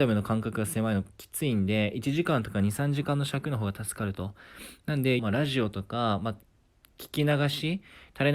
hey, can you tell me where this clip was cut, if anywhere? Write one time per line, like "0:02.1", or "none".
0:05.2